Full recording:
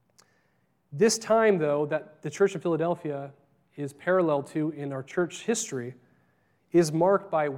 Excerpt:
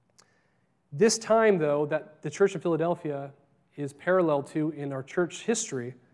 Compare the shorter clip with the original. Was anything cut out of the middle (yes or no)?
no